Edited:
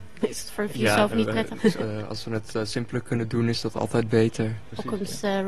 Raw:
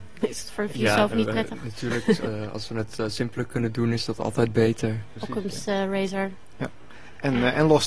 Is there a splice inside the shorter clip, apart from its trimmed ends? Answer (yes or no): yes